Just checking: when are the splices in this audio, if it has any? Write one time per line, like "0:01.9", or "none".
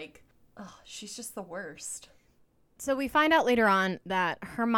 none